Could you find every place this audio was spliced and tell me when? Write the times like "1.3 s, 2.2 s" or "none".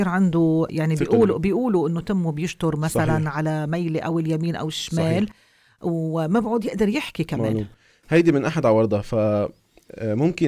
none